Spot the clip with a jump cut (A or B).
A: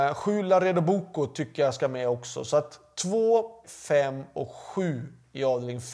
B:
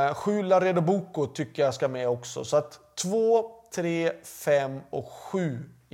A